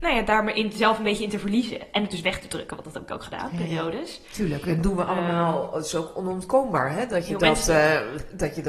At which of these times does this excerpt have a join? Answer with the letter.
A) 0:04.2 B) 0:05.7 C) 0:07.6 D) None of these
D